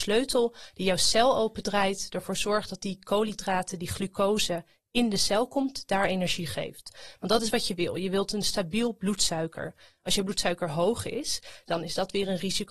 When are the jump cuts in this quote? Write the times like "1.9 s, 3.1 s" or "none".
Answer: none